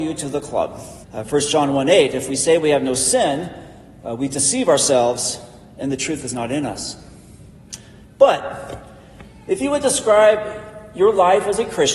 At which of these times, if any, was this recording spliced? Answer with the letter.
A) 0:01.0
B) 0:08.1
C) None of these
A